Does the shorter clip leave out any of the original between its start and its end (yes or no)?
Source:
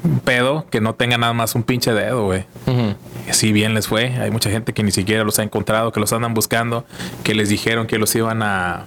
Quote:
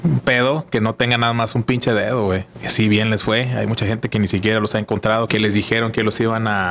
yes